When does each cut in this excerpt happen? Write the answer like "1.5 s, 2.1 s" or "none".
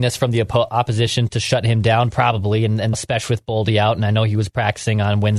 2.9 s